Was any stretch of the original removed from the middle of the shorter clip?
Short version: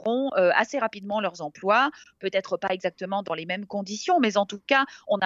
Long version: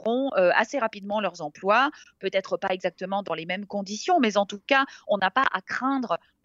no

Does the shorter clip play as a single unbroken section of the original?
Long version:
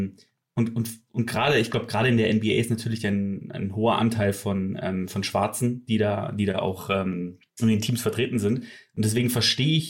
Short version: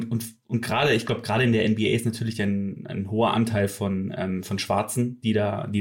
yes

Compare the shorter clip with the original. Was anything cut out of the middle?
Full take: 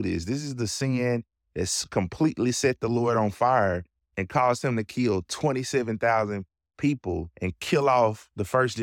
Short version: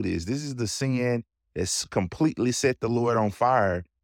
no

